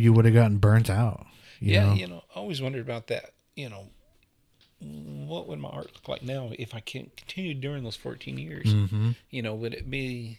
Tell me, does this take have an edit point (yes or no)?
no